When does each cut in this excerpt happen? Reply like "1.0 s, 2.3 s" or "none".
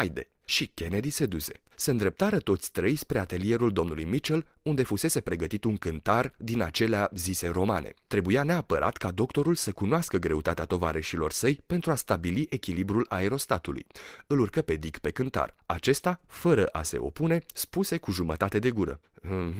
none